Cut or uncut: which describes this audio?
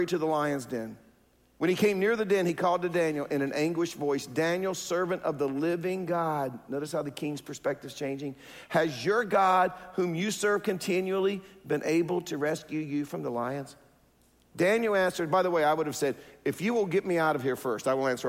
uncut